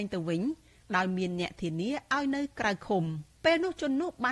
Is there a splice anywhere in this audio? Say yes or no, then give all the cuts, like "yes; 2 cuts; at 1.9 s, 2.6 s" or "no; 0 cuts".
yes; 1 cut; at 3.3 s